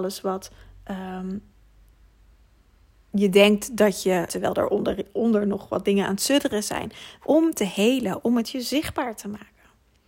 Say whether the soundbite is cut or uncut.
cut